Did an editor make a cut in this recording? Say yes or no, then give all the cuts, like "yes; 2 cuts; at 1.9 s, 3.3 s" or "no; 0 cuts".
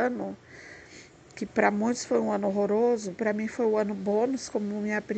no; 0 cuts